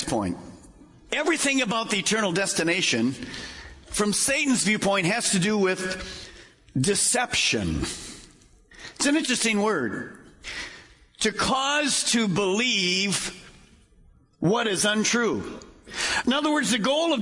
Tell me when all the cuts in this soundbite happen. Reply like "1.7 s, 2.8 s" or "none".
none